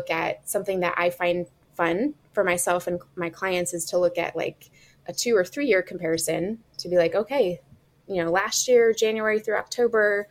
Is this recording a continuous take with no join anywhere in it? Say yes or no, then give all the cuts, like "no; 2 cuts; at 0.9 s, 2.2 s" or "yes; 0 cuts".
yes; 0 cuts